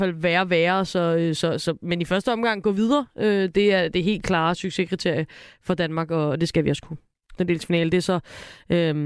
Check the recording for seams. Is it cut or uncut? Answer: cut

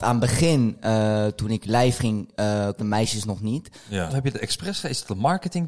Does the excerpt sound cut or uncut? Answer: cut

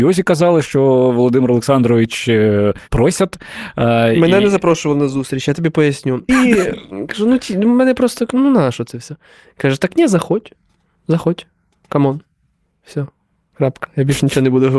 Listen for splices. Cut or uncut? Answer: cut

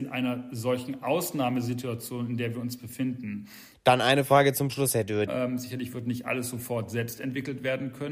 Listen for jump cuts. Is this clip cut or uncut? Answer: cut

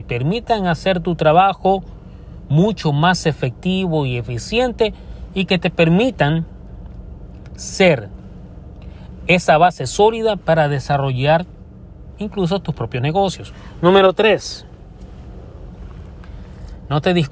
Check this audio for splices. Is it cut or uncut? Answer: uncut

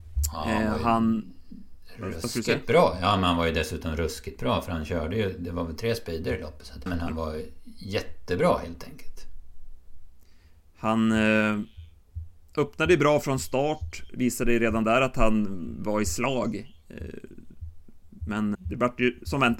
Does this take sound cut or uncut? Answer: cut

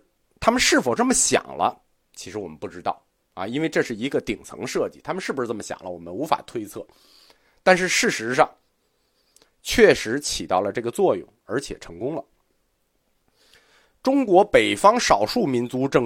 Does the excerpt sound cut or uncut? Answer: uncut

